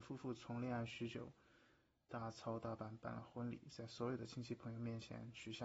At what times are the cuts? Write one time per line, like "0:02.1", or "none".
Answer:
none